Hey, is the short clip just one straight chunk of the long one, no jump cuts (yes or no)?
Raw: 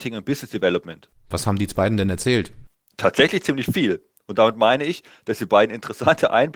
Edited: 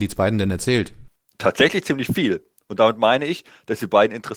yes